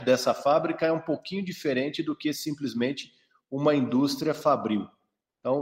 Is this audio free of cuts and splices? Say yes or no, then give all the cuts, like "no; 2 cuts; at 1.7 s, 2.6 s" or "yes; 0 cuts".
yes; 0 cuts